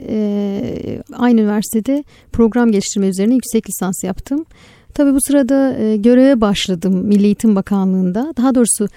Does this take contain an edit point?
yes; 1 cut; at 1.1 s

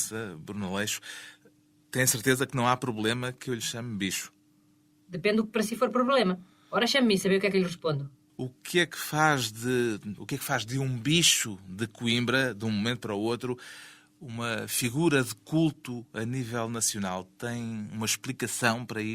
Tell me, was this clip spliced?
yes; 2 cuts; at 8.3 s, 10.2 s

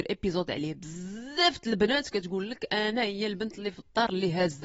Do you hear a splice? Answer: no; 0 cuts

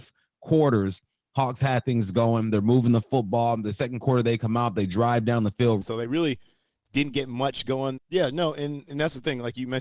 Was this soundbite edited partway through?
yes; 2 cuts; at 5.8 s, 8.0 s

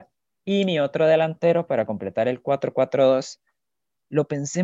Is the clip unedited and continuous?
yes; 0 cuts

